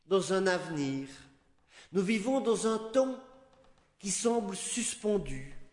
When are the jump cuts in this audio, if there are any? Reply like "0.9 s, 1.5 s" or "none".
none